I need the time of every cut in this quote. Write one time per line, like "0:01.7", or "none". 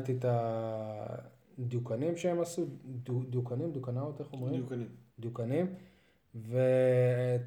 none